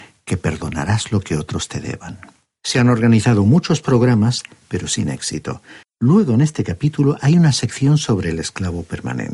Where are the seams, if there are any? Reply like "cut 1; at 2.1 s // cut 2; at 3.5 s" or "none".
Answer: cut 1; at 2.5 s // cut 2; at 5.8 s